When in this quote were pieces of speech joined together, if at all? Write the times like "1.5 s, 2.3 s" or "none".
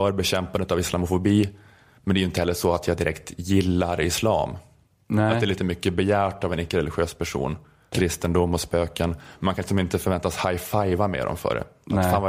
7.9 s